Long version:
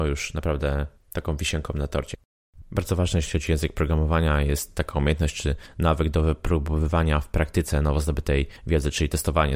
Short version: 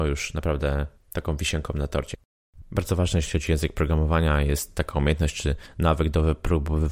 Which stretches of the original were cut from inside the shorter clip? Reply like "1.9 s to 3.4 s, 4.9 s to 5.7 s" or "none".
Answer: none